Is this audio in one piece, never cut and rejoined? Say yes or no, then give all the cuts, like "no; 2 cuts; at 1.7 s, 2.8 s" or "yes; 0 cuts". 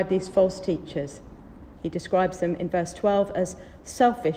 no; 1 cut; at 1.8 s